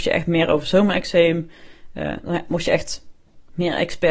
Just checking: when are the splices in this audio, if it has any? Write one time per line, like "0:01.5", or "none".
none